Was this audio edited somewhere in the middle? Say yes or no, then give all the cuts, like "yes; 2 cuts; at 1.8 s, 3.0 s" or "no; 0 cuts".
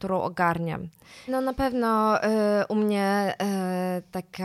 yes; 1 cut; at 1.3 s